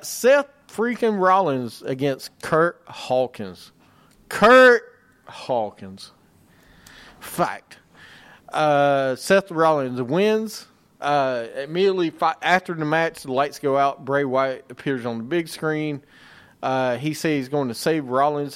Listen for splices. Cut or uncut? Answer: uncut